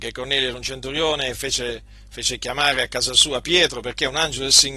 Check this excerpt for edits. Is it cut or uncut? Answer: uncut